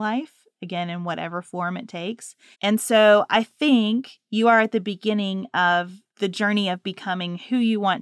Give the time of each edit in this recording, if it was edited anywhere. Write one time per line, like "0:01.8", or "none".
0:02.5
0:06.1